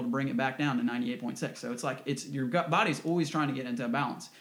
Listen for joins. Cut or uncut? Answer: uncut